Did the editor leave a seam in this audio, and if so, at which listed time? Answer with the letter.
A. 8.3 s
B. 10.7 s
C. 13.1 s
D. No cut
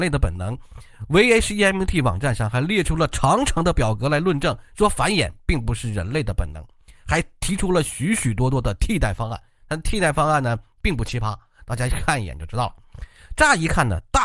D